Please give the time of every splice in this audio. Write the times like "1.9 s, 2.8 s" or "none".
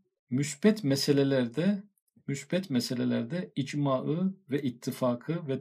none